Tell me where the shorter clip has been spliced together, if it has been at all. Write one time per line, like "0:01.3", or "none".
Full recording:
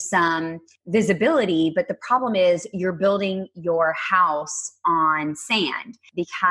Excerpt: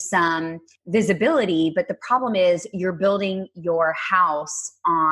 none